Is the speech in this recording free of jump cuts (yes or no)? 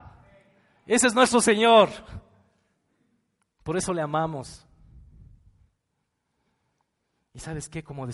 yes